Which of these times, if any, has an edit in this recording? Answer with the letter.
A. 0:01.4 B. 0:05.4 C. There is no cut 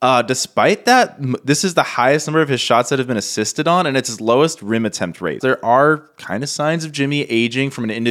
B